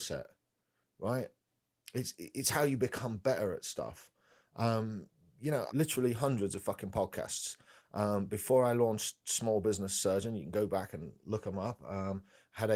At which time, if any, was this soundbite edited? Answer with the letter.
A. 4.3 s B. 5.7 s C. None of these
B